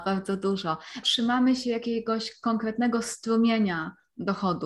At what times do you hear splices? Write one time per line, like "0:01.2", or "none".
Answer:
0:01.0